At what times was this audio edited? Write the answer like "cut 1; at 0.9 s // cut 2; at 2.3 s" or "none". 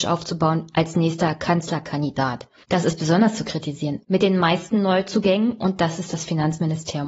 cut 1; at 2.6 s // cut 2; at 4.0 s